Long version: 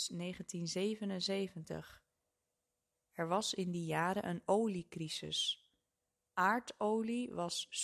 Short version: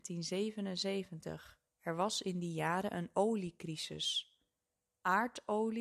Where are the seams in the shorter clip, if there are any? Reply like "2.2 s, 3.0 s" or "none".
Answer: 1.7 s